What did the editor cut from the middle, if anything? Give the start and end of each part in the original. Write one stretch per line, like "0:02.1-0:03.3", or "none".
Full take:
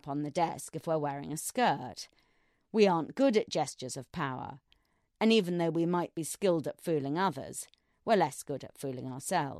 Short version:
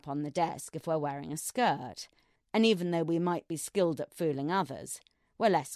0:02.4-0:05.0